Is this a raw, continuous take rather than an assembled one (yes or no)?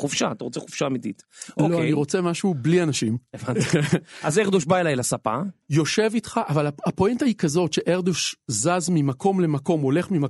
yes